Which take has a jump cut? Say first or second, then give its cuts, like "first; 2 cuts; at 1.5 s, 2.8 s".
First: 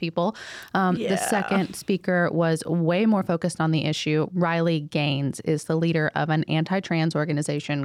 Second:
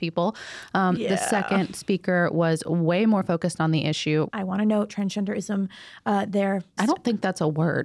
second; 2 cuts; at 4.3 s, 6.8 s